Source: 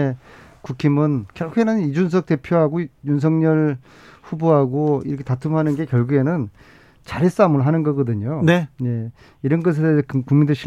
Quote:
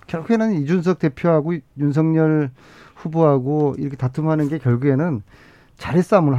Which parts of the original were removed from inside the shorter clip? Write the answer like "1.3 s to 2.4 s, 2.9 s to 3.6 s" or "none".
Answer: none

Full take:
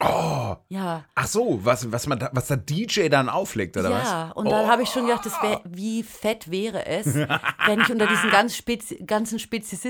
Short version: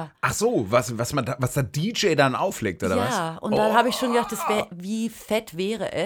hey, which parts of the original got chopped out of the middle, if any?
none

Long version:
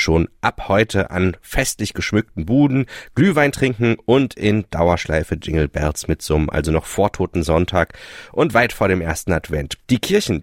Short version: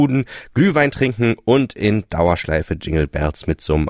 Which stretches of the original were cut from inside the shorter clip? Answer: none

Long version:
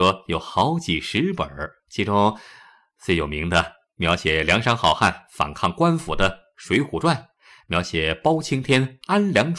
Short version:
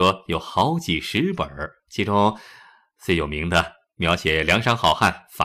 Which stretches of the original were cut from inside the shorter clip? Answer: none

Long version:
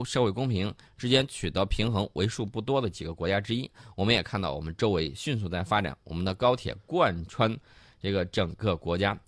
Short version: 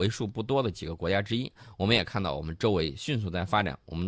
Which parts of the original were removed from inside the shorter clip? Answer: none

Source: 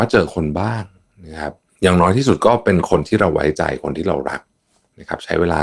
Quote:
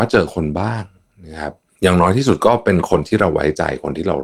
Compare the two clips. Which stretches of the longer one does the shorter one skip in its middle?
none

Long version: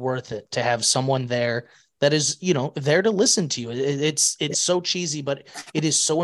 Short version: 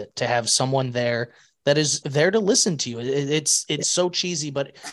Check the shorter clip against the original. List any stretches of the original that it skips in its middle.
2.4 s to 2.7 s

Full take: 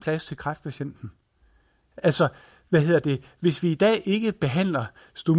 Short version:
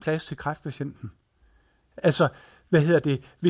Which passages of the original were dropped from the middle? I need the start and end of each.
none

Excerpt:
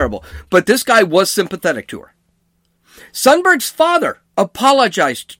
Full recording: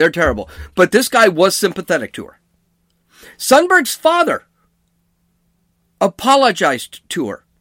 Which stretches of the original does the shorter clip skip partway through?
4.5 s to 5.9 s

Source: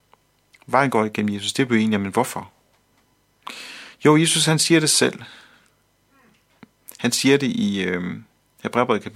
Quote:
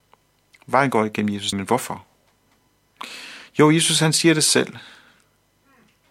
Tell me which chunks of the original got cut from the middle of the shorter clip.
1.5 s to 2.0 s

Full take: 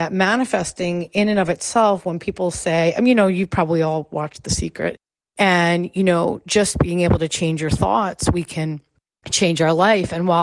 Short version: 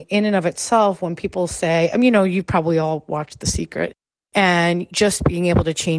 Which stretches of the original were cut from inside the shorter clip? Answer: 5.9 s to 6.4 s

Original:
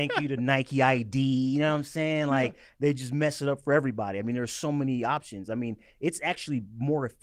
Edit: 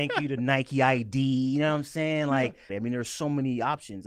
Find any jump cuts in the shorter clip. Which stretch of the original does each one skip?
2.7 s to 4.1 s

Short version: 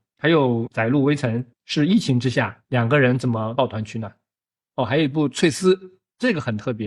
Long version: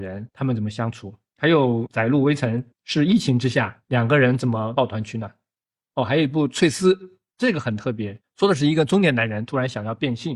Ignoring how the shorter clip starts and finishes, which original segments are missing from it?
none

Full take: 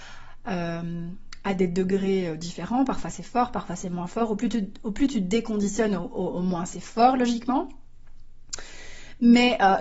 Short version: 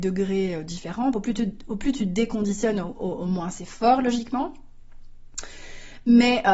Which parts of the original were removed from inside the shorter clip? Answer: 2.9 s to 4.3 s

